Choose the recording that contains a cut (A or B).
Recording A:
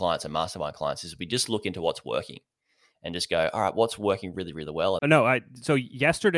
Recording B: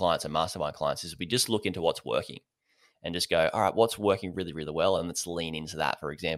A